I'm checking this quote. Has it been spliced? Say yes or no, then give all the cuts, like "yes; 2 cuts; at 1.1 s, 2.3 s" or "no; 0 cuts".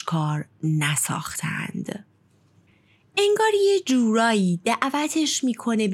no; 0 cuts